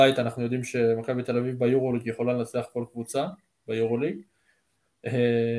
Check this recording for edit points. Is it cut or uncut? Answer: uncut